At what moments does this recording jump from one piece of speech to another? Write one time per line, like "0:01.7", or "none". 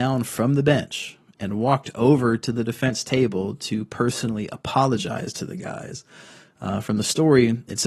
none